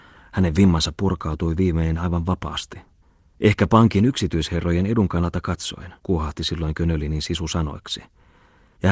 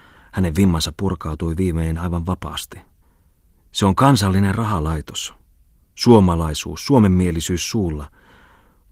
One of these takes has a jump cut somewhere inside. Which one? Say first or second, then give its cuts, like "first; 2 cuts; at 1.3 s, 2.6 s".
first; 2 cuts; at 3.3 s, 6.0 s